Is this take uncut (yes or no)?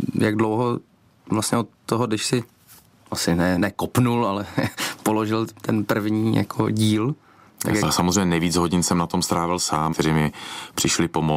no